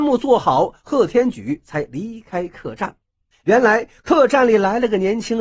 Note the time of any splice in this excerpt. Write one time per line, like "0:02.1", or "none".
0:03.3